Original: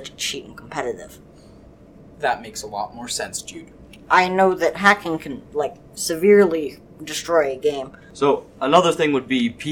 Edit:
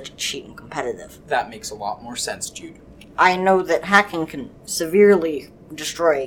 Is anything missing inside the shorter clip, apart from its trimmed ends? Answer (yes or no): yes